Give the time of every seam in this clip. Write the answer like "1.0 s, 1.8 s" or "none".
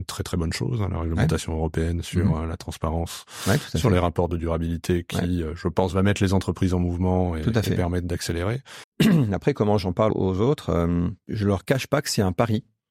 8.8 s, 10.1 s